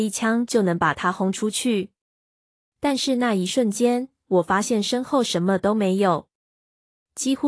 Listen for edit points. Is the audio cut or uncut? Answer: uncut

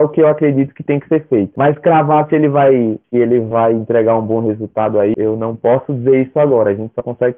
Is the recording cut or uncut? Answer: cut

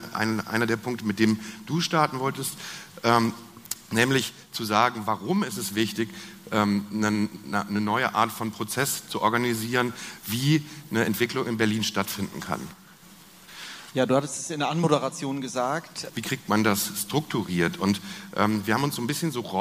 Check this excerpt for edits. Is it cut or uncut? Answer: cut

